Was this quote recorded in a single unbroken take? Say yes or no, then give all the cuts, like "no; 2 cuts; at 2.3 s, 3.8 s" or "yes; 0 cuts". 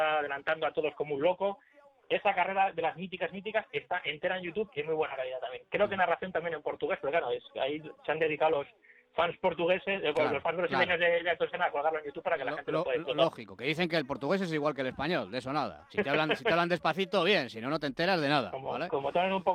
no; 1 cut; at 15.9 s